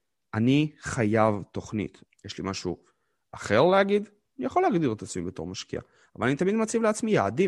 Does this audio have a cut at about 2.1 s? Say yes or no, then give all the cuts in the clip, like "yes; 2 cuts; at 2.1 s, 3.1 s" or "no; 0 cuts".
yes; 2 cuts; at 2.1 s, 4.3 s